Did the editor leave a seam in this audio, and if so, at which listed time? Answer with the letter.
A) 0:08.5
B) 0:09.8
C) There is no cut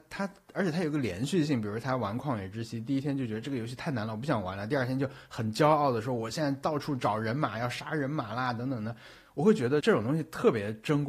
B